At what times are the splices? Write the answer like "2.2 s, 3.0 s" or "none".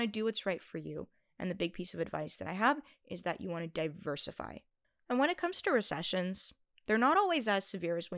none